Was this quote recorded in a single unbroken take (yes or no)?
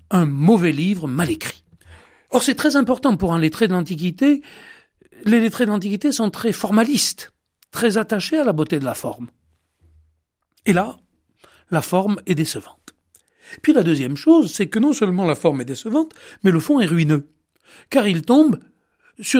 yes